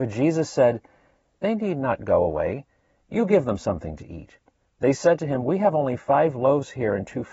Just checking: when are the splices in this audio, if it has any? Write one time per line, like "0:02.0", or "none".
none